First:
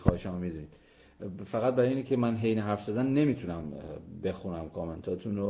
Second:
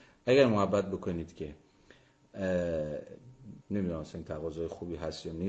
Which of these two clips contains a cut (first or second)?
second